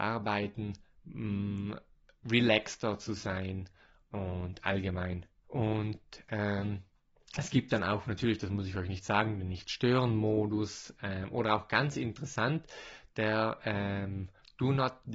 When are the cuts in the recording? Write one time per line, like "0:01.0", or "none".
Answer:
0:05.4